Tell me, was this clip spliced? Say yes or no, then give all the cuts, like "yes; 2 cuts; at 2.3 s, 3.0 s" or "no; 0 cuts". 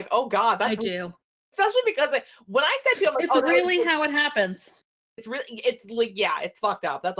no; 0 cuts